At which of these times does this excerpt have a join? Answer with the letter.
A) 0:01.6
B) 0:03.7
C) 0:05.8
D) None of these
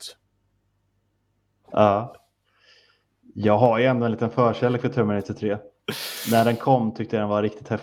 A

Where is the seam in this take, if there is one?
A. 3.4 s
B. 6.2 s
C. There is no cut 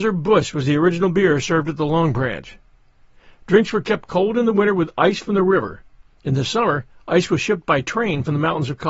C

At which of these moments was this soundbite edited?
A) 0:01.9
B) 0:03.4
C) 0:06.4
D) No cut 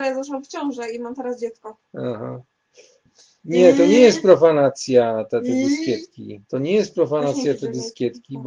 C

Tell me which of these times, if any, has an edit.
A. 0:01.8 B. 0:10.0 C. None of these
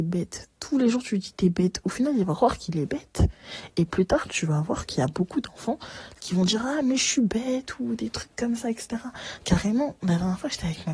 C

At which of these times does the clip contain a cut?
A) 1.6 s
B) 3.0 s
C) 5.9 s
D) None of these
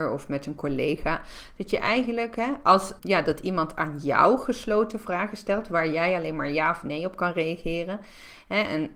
B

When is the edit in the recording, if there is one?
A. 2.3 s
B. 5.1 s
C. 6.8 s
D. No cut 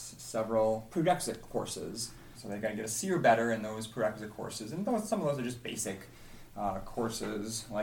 A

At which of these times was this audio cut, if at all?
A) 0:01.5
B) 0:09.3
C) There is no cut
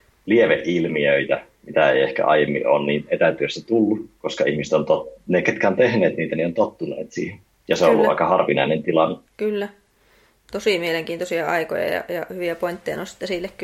B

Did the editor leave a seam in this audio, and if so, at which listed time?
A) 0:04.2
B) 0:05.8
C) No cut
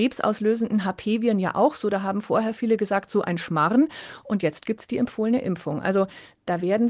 C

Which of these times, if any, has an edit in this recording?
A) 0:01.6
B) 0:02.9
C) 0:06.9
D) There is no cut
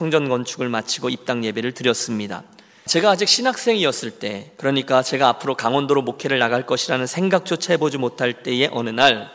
B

